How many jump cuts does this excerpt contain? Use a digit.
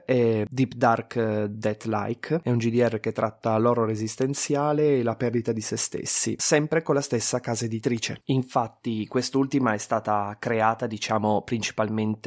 0